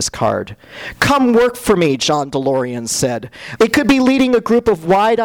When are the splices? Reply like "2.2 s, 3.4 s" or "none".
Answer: 3.6 s